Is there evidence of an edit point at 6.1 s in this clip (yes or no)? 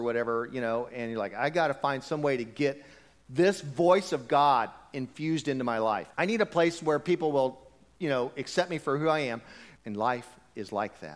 yes